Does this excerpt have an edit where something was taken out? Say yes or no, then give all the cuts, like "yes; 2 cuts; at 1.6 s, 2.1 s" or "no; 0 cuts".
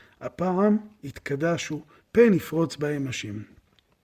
yes; 1 cut; at 2.0 s